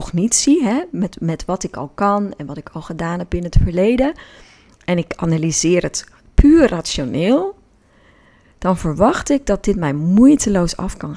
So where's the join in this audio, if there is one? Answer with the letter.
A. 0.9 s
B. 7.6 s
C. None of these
C